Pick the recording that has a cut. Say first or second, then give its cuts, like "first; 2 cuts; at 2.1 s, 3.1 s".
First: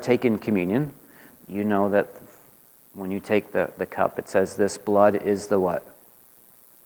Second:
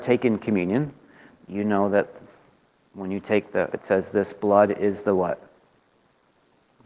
second; 1 cut; at 3.7 s